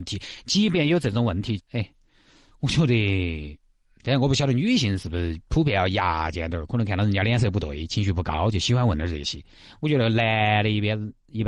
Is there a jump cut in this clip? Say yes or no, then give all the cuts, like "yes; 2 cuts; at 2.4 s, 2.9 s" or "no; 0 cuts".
yes; 1 cut; at 1.6 s